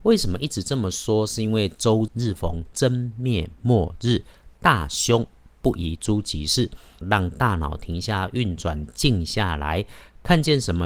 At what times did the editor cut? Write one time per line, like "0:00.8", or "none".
0:02.1
0:07.0